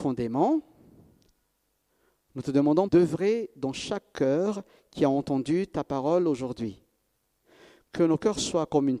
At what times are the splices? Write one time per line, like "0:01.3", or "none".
0:02.9